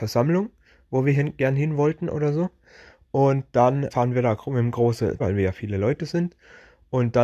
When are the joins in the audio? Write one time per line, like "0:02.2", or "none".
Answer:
0:03.9
0:05.2